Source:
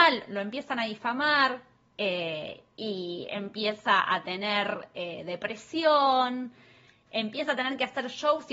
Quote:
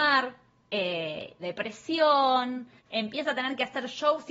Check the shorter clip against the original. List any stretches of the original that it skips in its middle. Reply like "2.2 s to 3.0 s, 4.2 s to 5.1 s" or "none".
2.7 s to 5.2 s, 6.6 s to 7.0 s

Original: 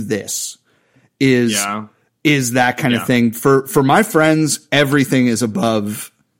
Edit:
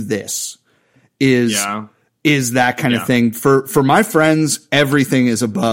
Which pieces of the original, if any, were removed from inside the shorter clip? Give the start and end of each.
none

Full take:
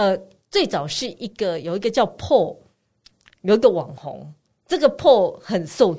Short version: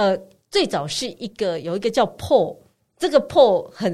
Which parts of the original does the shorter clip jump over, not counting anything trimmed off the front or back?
2.8 s to 4.5 s

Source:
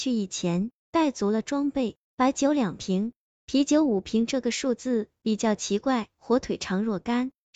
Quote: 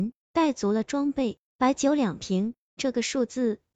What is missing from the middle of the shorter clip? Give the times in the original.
3.4 s to 4.3 s

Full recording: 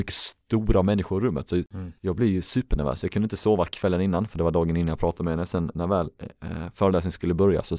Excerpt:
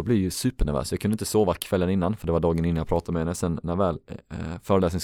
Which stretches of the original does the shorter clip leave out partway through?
none

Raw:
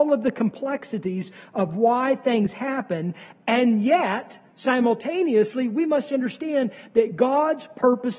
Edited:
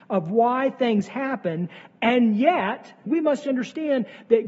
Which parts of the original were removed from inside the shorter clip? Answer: 4.5 s to 5.7 s

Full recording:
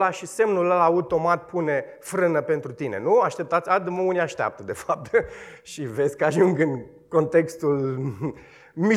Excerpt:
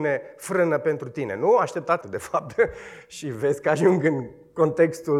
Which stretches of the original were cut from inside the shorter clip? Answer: 3.6 s to 4.6 s

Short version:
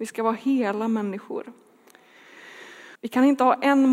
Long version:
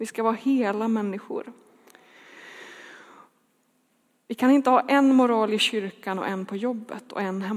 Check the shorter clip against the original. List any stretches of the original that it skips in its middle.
3.0 s to 4.2 s

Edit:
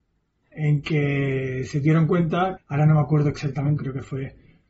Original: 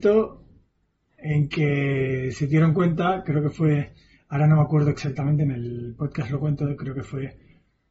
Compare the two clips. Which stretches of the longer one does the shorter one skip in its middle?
3.2 s to 4.2 s, 5.4 s to 6.8 s

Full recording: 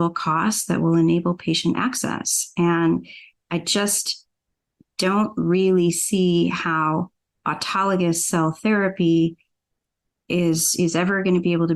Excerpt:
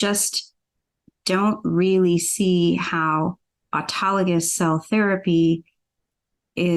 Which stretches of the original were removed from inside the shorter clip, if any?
none

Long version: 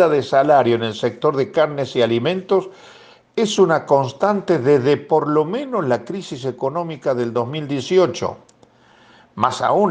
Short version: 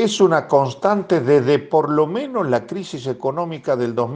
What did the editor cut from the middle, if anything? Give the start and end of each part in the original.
none

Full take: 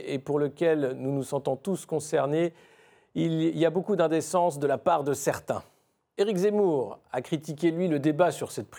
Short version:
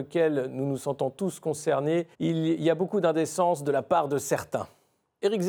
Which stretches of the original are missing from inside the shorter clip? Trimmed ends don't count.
2.6 s to 3.1 s

